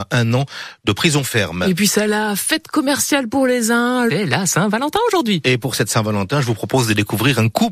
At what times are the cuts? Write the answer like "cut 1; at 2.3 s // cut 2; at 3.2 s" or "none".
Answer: cut 1; at 4.1 s